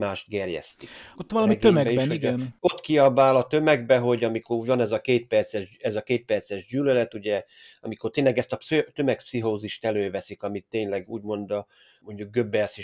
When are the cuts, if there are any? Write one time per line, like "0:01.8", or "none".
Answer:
0:01.1